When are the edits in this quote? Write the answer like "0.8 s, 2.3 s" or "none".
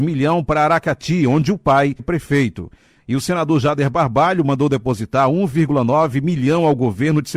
2.0 s